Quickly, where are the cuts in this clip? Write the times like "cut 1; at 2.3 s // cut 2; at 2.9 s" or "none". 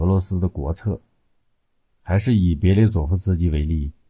cut 1; at 1.9 s